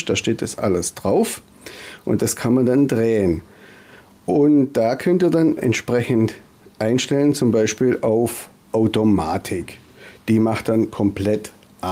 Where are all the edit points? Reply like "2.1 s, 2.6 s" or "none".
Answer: 5.6 s